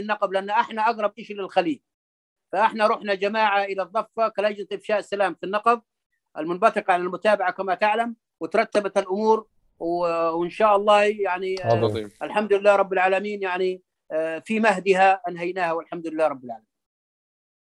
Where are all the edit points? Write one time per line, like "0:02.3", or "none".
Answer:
none